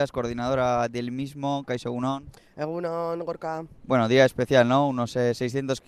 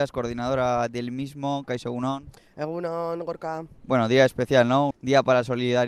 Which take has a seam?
second; 1 cut; at 4.9 s

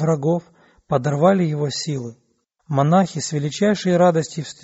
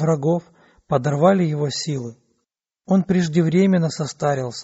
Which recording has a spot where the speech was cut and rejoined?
first; 1 cut; at 2.6 s

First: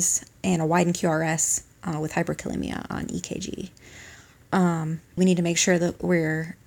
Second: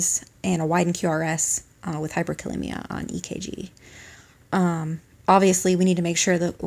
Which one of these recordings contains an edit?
first; 1 cut; at 5.2 s

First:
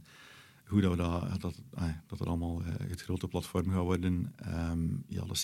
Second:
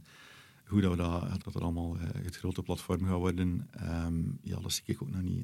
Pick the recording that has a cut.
second; 1 cut; at 1.4 s

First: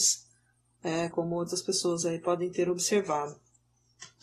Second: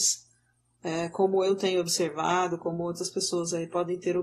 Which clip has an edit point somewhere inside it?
first; 1 cut; at 1.1 s

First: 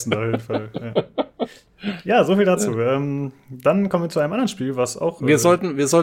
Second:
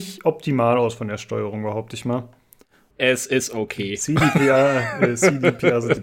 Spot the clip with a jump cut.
second; 1 cut; at 2.9 s

